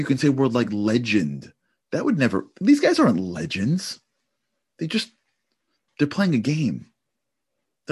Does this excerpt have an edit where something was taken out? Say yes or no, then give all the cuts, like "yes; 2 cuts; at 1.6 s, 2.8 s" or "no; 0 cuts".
yes; 1 cut; at 5.9 s